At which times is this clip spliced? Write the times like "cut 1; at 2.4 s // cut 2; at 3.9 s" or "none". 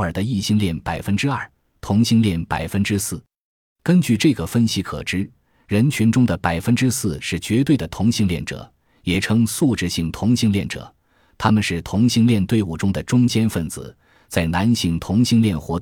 none